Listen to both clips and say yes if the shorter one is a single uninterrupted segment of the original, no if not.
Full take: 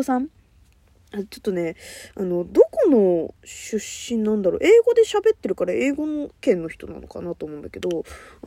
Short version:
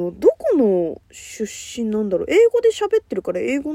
yes